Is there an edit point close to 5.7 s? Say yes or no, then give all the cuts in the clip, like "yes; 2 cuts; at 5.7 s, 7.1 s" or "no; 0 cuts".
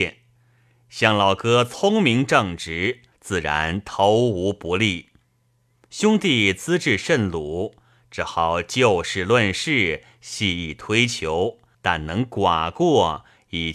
no; 2 cuts; at 3.1 s, 11.7 s